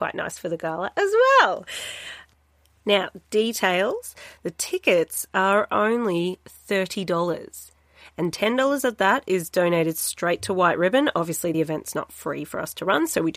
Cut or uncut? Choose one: uncut